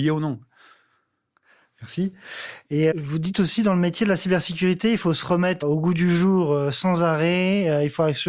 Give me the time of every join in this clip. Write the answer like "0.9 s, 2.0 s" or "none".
2.9 s, 5.6 s